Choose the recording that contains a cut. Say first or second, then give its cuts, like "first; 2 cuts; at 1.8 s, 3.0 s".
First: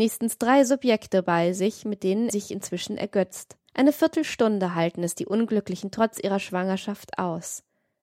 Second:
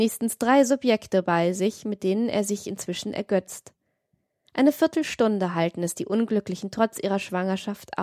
first; 2 cuts; at 2.3 s, 3.7 s